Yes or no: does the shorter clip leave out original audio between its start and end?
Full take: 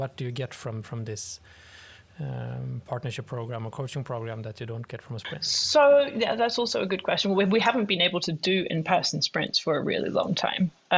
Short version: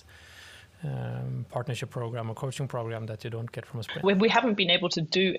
yes